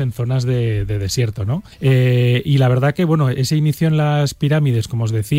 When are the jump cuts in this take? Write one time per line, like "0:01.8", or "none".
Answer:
0:01.7